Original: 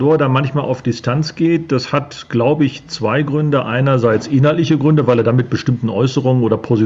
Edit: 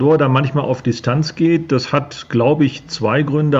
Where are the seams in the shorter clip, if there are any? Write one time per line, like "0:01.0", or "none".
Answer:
none